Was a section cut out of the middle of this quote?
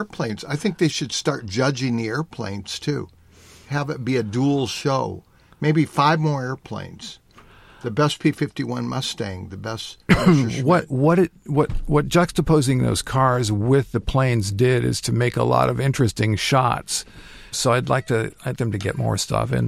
yes; 2 cuts; at 17.5 s, 18.5 s

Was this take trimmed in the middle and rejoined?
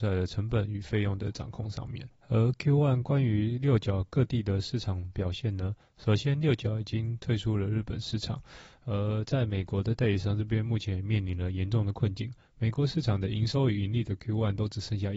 no; 0 cuts

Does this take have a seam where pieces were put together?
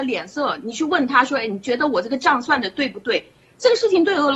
yes; 1 cut; at 3.4 s

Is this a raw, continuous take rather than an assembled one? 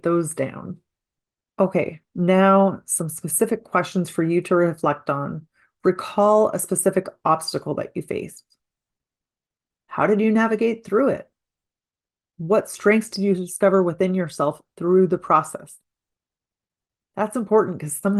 yes; 0 cuts

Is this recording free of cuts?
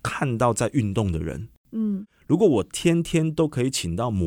yes; 0 cuts

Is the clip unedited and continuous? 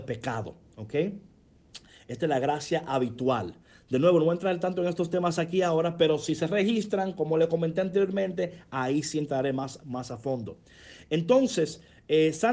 yes; 0 cuts

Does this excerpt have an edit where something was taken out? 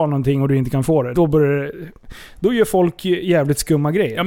yes; 1 cut; at 1.1 s

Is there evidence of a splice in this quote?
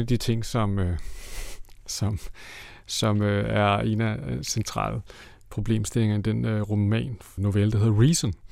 yes; 1 cut; at 7.4 s

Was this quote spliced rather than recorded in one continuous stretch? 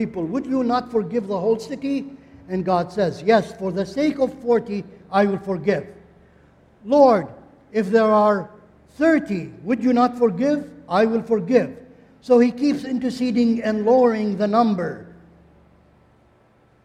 no; 0 cuts

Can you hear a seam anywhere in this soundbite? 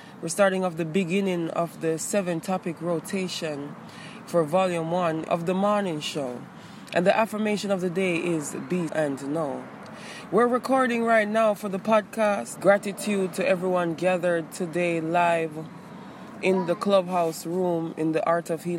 yes; 3 cuts; at 5.3 s, 8.9 s, 12.6 s

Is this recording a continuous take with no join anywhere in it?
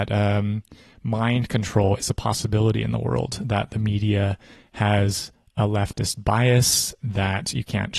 yes; 0 cuts

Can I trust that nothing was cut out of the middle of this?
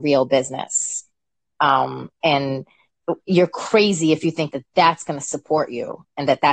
yes; 0 cuts

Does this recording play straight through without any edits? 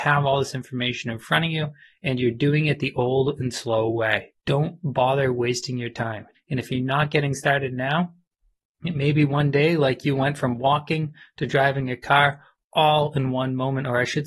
no; 2 cuts; at 4.4 s, 6.3 s

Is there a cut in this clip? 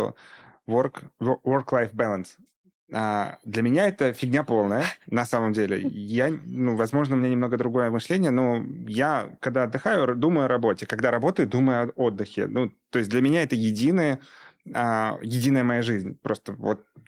no; 0 cuts

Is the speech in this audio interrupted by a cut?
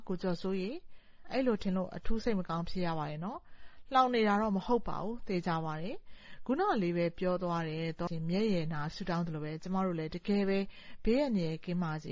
yes; 1 cut; at 8.1 s

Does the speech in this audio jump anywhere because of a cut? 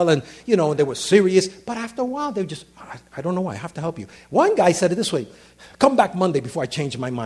no; 0 cuts

